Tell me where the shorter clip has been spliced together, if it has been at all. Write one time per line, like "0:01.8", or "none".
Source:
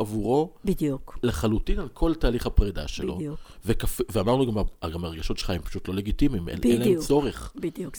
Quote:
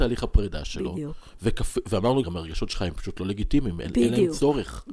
0:02.2